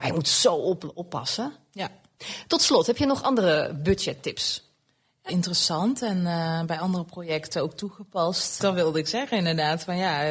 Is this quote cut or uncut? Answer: cut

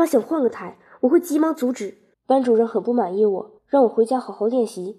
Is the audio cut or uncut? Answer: cut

